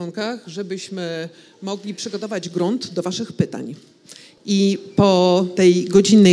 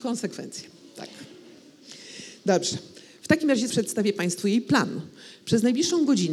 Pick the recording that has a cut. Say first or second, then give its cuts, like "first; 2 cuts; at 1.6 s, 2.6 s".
second; 1 cut; at 3.7 s